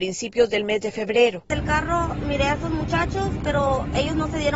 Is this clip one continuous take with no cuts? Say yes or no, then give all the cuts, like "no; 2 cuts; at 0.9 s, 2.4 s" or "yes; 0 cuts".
yes; 0 cuts